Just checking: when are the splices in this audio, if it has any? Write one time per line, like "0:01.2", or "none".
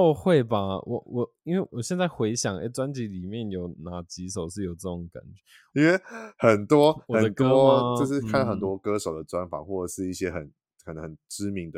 0:01.7
0:05.7